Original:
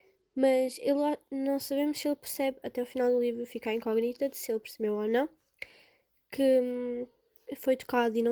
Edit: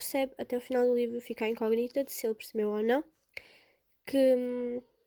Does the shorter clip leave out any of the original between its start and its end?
no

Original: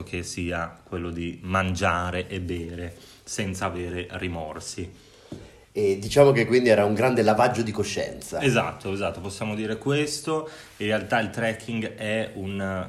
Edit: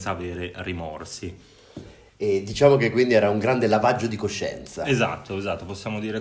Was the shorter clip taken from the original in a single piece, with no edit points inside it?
yes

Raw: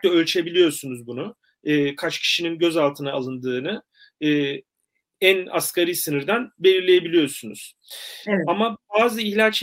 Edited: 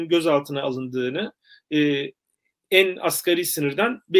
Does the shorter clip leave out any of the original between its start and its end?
no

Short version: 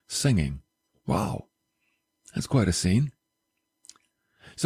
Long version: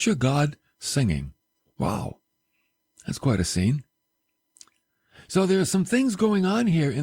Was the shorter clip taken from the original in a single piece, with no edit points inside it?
yes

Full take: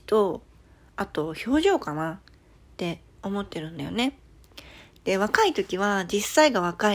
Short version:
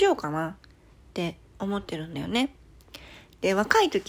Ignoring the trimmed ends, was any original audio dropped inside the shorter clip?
no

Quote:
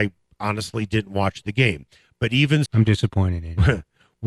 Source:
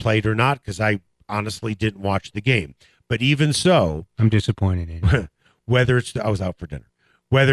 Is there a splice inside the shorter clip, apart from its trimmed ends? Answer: yes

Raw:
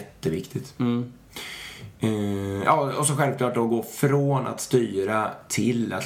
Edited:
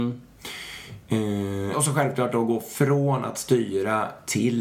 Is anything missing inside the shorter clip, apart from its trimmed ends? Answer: yes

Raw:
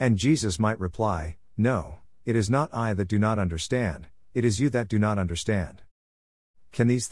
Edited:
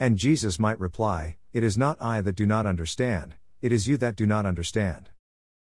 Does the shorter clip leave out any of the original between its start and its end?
yes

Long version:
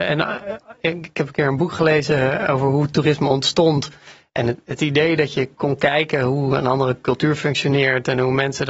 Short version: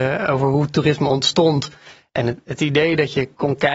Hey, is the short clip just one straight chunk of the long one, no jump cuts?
yes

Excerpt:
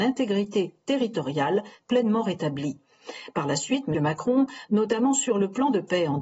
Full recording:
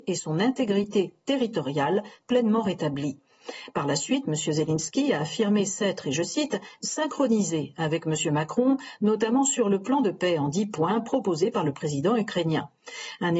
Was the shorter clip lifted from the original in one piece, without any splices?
no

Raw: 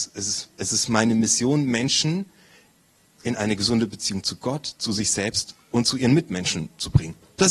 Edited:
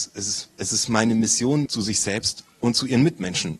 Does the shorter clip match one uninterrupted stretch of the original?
no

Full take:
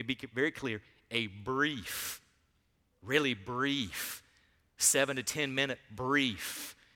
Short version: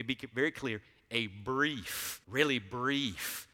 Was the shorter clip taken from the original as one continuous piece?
no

